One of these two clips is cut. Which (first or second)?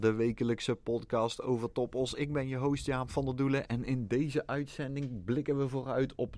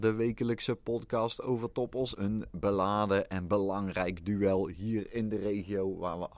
second